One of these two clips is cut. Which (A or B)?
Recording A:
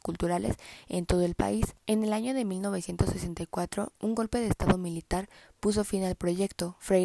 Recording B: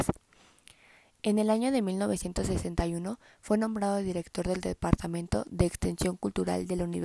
A